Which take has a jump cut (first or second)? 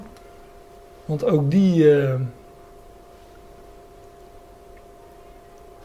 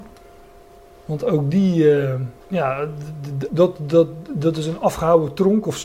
second